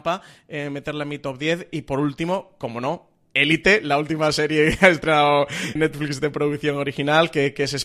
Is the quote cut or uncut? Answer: cut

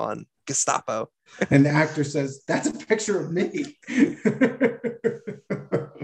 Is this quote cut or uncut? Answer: cut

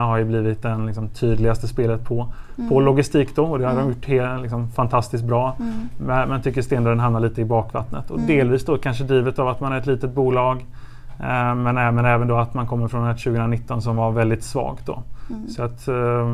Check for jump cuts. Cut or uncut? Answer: uncut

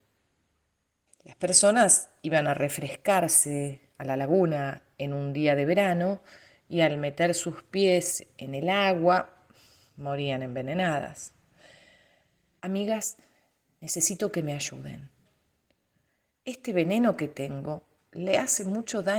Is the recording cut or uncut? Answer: cut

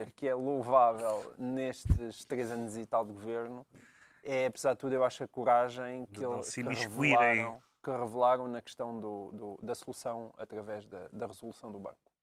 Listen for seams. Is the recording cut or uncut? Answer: uncut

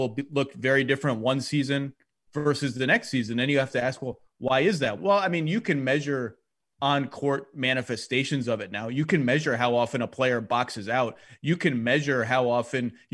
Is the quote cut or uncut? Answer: cut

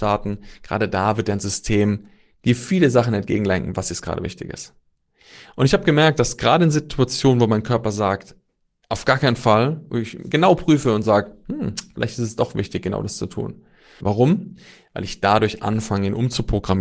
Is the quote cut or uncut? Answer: cut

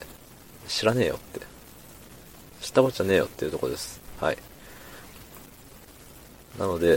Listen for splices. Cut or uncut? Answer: uncut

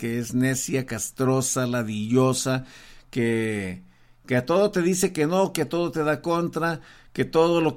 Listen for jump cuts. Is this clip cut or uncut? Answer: uncut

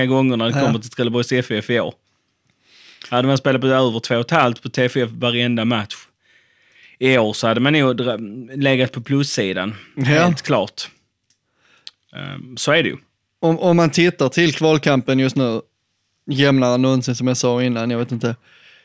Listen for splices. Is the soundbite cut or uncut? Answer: uncut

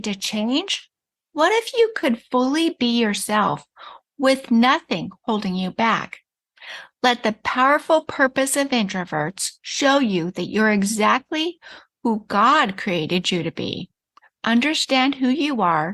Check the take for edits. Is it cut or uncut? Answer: uncut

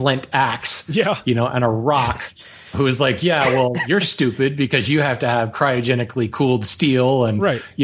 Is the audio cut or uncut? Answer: uncut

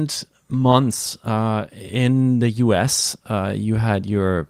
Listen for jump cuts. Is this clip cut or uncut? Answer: uncut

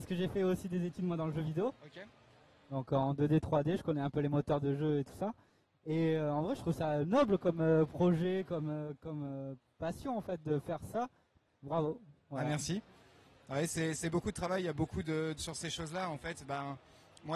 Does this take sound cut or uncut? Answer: cut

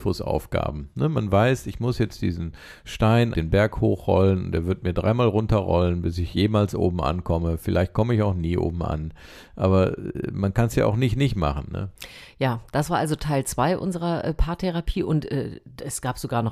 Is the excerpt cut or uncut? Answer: cut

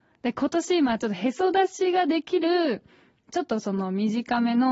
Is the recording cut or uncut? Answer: cut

